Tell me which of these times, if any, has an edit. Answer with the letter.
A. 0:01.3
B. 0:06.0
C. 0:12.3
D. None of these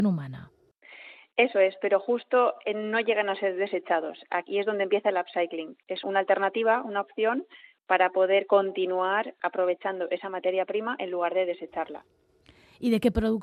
B